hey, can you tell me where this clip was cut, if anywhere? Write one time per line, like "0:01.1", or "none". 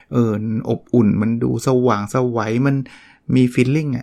none